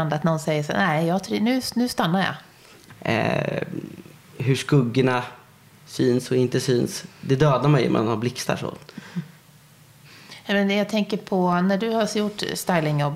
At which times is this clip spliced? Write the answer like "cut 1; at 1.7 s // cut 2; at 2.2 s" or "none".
cut 1; at 2.9 s